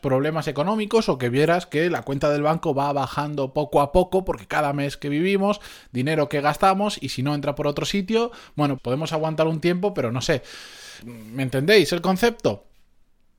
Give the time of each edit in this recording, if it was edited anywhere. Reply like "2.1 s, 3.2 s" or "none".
8.8 s, 11.0 s